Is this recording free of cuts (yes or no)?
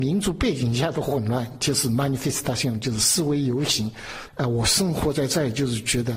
no